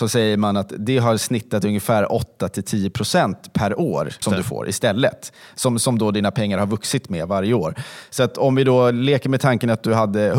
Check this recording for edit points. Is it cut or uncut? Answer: cut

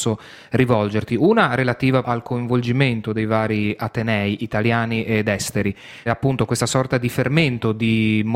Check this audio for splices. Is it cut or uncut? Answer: cut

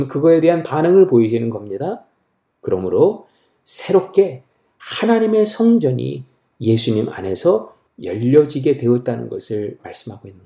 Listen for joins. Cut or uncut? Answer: cut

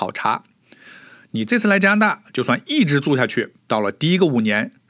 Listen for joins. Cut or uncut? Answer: cut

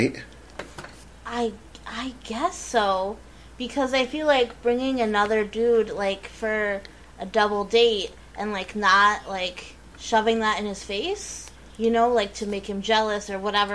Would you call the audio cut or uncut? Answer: uncut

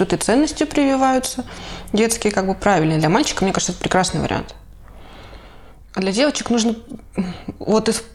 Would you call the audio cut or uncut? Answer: uncut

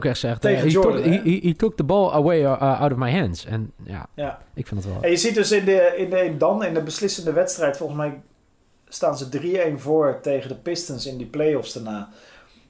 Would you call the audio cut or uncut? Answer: uncut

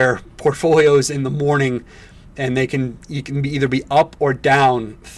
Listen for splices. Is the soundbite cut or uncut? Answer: uncut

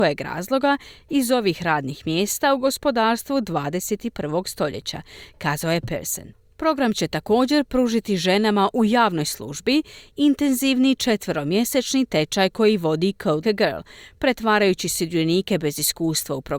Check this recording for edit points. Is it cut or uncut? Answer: cut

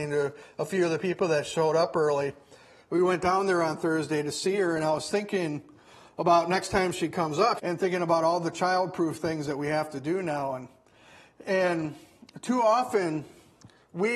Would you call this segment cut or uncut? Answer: cut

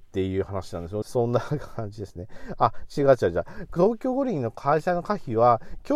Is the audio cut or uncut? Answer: cut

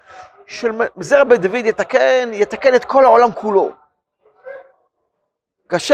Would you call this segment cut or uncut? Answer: uncut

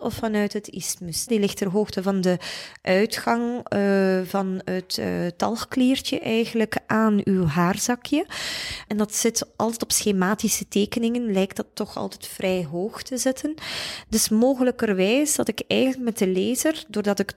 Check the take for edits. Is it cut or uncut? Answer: cut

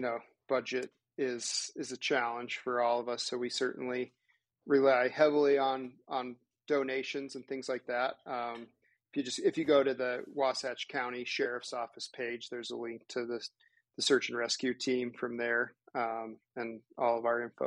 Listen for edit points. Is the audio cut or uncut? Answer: uncut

